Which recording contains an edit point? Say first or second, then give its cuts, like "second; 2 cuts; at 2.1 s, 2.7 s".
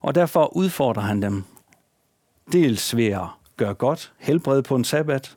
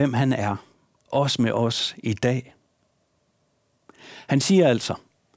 second; 1 cut; at 1.0 s